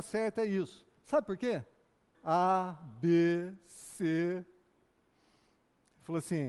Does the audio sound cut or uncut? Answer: cut